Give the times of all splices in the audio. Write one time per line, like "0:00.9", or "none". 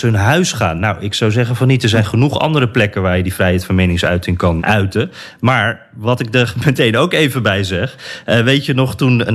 0:04.6